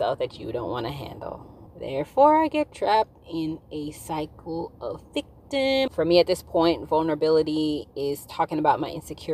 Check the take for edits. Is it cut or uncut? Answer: cut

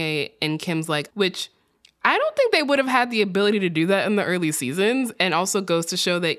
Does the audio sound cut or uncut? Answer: cut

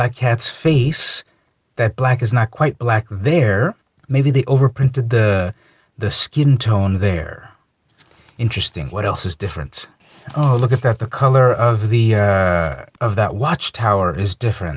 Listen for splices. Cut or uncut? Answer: uncut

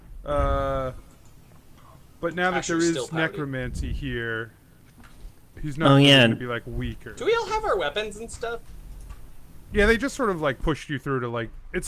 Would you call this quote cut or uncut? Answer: uncut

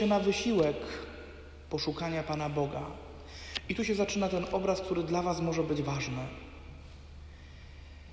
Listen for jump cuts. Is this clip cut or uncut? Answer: uncut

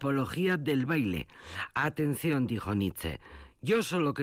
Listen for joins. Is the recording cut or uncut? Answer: uncut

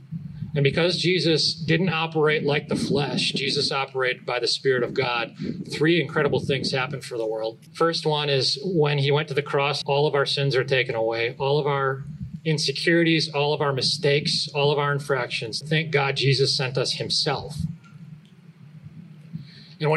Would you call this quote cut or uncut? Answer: cut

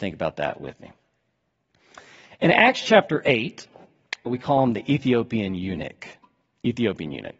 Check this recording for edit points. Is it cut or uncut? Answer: cut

